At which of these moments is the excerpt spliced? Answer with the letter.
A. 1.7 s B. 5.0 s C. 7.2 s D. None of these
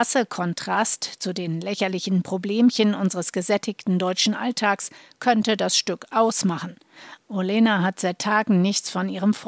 C